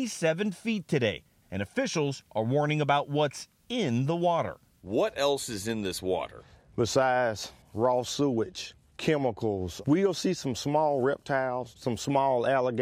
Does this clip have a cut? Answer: yes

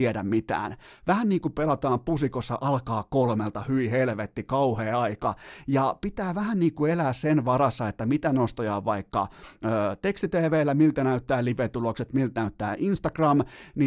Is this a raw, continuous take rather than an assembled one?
yes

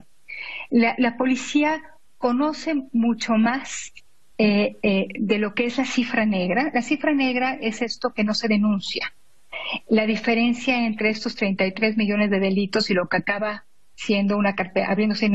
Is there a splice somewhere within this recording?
no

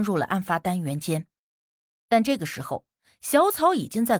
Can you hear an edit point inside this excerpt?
no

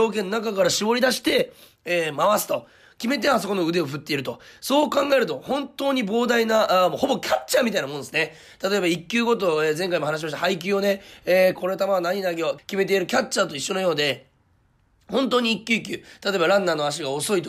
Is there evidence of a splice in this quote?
yes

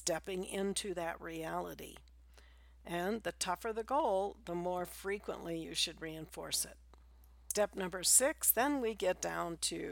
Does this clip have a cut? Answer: no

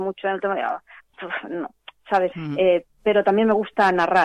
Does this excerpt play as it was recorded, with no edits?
no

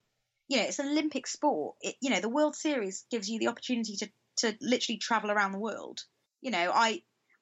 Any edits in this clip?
yes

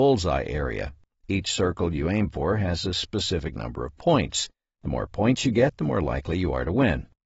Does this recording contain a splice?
no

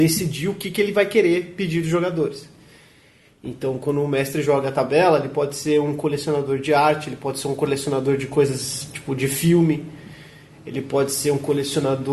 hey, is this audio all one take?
yes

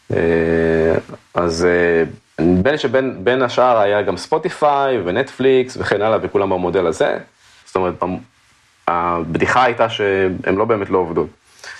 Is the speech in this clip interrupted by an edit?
yes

